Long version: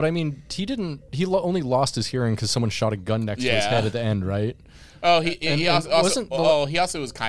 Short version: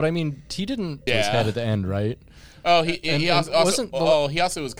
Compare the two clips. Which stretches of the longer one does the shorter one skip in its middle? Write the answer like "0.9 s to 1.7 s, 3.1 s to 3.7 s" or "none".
1.1 s to 3.5 s